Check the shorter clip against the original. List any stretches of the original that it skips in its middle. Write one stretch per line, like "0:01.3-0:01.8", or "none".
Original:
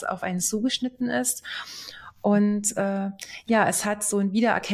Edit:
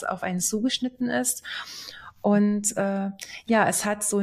none